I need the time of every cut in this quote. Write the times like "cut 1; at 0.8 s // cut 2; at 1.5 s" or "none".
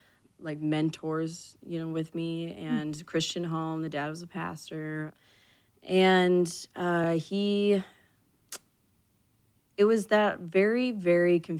none

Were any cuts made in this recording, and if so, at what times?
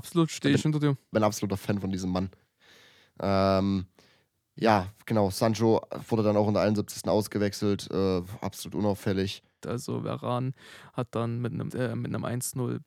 cut 1; at 9.6 s // cut 2; at 11.7 s

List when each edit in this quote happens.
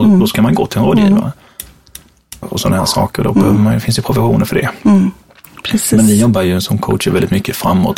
cut 1; at 2.4 s

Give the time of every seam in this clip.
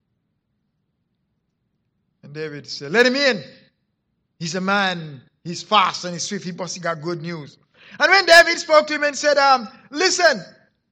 none

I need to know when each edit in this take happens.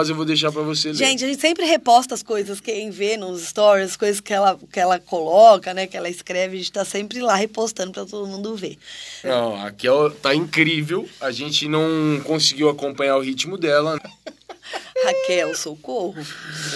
cut 1; at 9.2 s // cut 2; at 14.0 s

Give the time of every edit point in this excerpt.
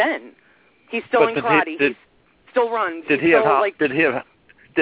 none

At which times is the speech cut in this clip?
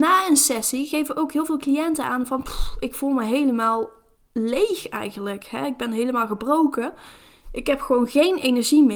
none

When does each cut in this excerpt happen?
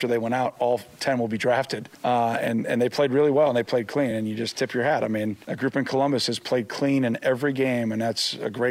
none

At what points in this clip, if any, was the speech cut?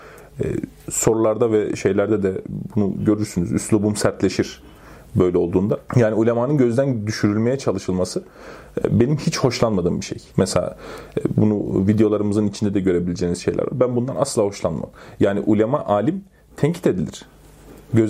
cut 1; at 10.3 s

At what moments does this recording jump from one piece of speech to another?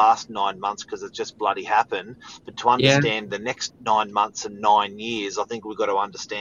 cut 1; at 3.7 s

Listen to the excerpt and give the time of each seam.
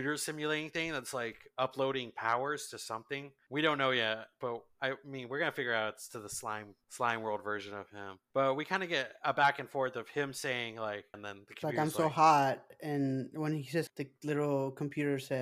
cut 1; at 11.1 s // cut 2; at 13.9 s

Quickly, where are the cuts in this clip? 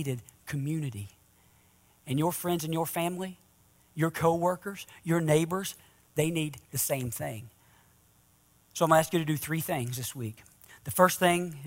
none

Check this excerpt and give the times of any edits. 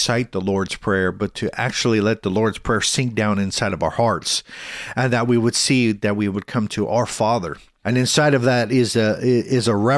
cut 1; at 7.8 s

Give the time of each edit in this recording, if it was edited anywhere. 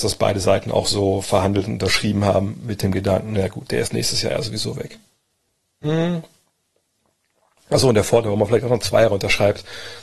none

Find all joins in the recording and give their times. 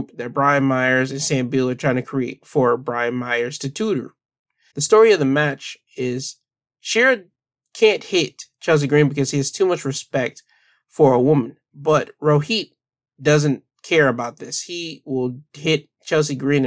cut 1; at 4.7 s

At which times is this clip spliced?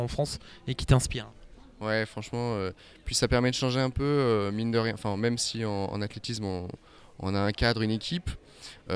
none

